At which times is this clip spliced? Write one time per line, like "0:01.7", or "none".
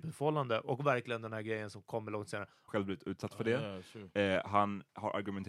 0:02.7